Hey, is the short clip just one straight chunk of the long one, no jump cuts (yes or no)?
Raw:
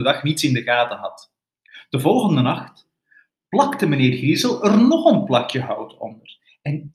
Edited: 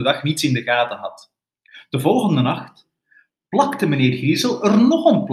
yes